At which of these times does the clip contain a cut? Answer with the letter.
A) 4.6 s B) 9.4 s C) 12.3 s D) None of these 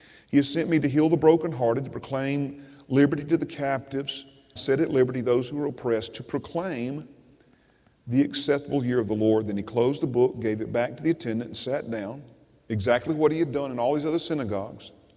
A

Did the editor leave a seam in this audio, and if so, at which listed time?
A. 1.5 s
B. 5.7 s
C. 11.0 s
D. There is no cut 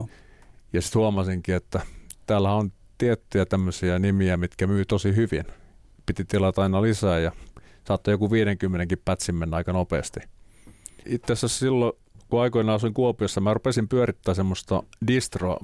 C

